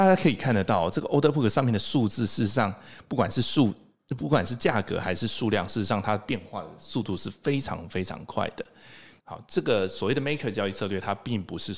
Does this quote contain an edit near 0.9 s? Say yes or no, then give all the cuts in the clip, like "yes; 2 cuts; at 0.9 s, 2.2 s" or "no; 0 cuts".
no; 1 cut; at 9.2 s